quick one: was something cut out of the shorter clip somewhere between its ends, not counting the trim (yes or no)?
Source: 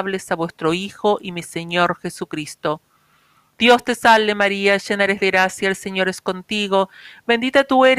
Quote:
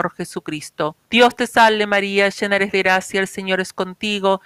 yes